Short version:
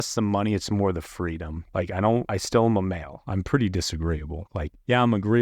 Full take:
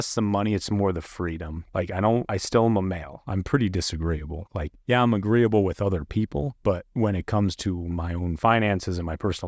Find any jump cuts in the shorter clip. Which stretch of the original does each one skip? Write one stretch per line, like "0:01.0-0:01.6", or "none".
none